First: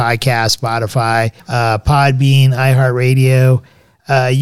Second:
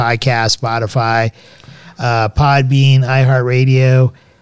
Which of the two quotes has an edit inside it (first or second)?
first